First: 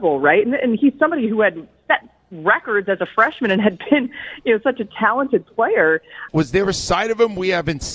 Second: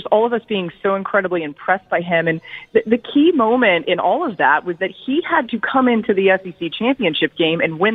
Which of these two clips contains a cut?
first; 1 cut; at 6.3 s

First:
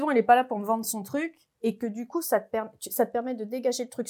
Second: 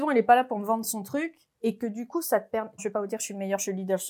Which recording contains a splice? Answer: second; 1 cut; at 2.8 s

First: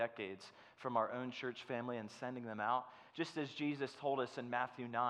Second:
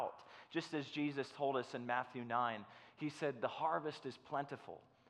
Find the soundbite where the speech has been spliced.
first; 1 cut; at 3.1 s

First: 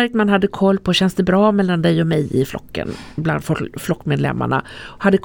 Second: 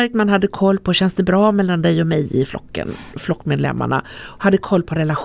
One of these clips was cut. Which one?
second; 1 cut; at 3.1 s

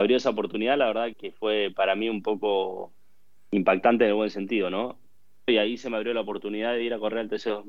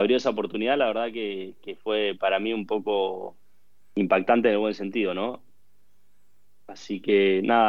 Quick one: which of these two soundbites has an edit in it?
first; 2 cuts; at 1.1 s, 5.5 s

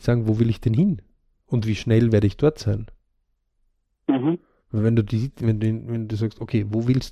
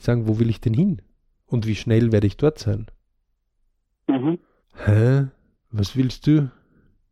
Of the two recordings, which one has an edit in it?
second; 1 cut; at 4.6 s

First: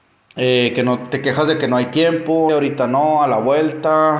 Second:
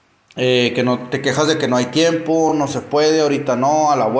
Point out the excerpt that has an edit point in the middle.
first; 1 cut; at 2.5 s

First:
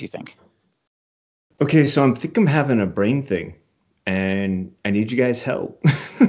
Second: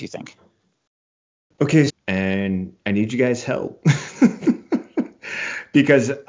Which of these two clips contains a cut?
second; 1 cut; at 1.9 s

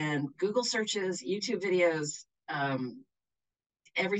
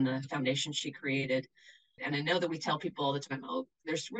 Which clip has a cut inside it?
second; 1 cut; at 2.0 s

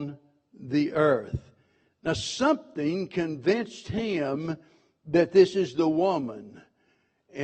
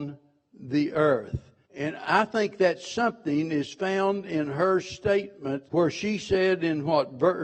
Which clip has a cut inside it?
second; 2 cuts; at 1.6 s, 5.7 s

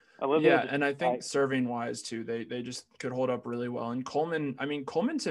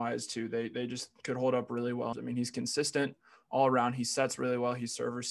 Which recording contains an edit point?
second; 1 cut; at 2.1 s

